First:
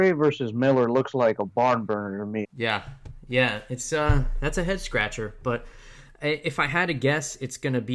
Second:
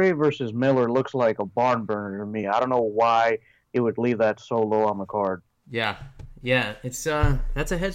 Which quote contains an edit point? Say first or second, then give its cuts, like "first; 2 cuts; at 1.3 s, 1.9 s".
first; 1 cut; at 2.4 s